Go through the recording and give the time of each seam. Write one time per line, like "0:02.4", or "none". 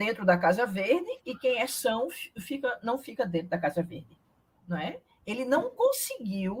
0:04.6